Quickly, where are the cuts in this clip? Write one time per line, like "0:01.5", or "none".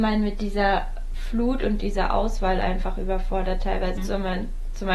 0:04.0